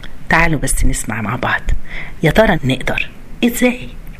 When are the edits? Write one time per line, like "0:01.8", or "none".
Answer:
0:02.6